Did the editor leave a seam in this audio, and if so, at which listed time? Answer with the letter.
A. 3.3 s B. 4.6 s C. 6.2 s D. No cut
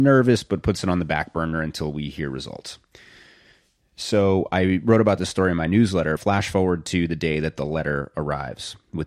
C